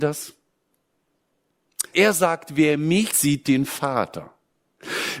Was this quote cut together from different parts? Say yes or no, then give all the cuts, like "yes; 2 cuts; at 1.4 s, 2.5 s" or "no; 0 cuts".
yes; 2 cuts; at 1.9 s, 3.1 s